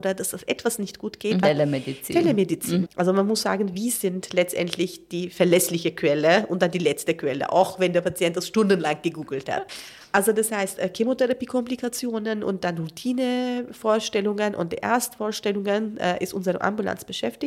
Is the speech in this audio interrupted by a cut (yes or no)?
yes